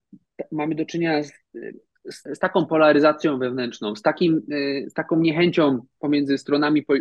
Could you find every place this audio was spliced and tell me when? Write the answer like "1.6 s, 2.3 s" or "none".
2.3 s